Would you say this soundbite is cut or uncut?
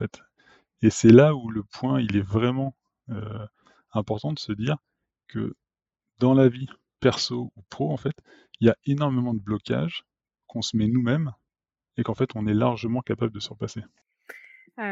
uncut